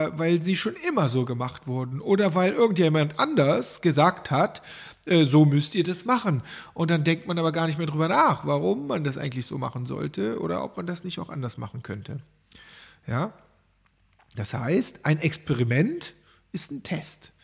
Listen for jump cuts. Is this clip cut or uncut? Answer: uncut